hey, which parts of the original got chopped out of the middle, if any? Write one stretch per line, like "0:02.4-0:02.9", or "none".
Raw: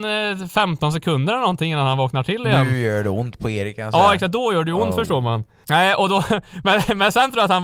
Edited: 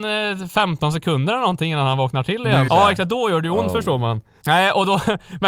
0:02.7-0:03.9